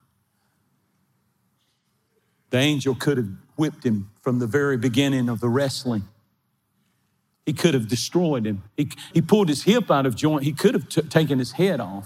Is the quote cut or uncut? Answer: cut